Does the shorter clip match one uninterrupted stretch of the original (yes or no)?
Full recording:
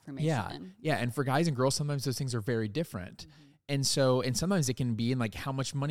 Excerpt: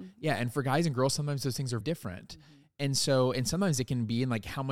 no